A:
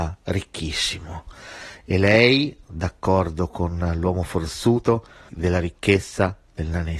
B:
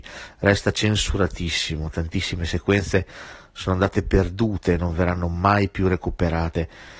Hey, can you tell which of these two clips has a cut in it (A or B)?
A